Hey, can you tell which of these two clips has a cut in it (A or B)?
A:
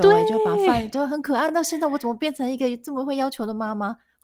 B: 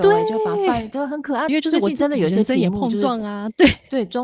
B